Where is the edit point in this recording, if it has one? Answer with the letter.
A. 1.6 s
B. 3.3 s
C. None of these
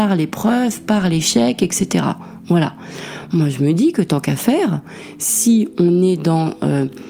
C